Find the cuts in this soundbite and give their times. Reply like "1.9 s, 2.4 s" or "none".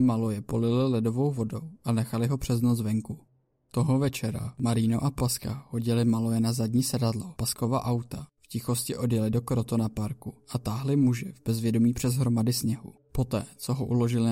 none